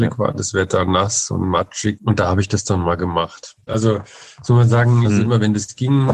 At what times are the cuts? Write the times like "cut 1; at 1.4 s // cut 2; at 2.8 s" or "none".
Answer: cut 1; at 3.7 s // cut 2; at 5.0 s